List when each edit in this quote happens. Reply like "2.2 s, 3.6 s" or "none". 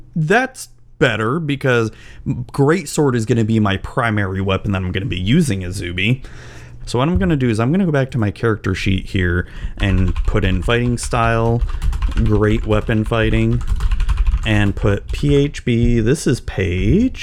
6.8 s, 10.6 s

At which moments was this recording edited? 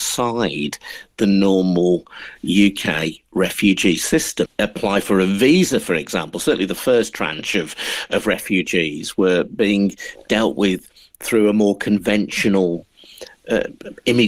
4.5 s

